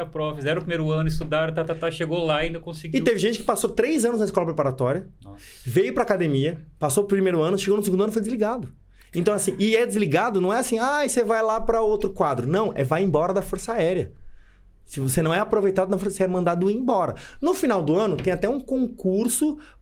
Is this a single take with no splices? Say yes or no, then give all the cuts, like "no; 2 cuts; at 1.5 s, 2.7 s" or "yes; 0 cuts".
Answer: yes; 0 cuts